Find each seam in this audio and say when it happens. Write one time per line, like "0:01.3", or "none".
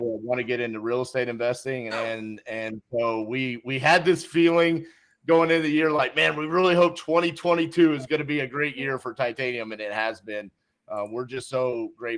0:01.9